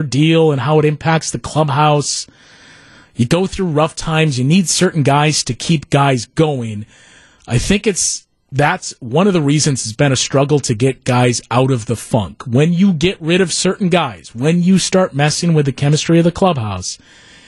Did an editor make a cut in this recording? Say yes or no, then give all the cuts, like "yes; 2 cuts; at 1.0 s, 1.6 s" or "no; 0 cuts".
no; 0 cuts